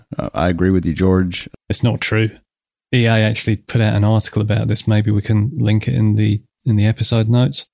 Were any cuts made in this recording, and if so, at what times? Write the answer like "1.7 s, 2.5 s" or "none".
1.6 s